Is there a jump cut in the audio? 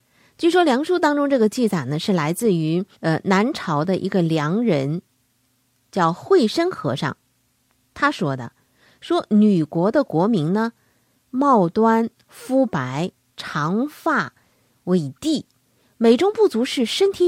yes; 1 cut; at 2.9 s

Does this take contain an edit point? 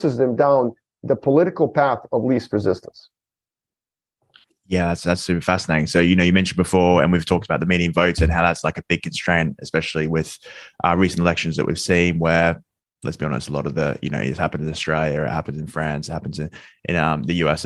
no; 0 cuts

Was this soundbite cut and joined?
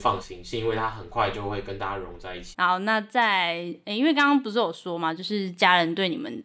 yes; 1 cut; at 2.5 s

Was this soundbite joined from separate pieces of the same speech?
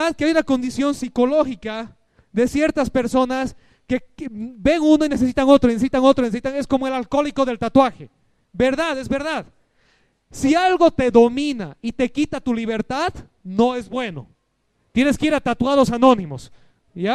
no; 0 cuts

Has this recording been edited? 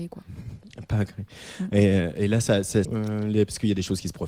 yes; 1 cut; at 2.8 s

